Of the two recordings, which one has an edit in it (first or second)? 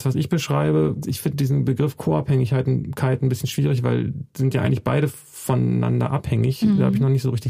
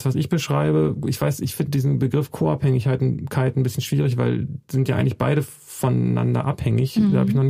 first